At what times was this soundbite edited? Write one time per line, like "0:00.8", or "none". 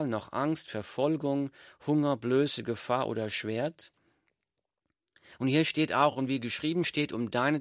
none

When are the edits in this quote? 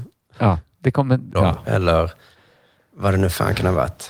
0:01.3

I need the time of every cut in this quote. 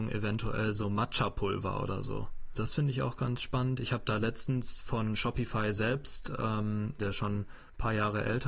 0:02.5
0:07.0

